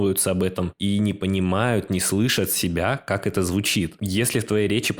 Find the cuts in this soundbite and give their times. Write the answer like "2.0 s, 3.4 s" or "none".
4.0 s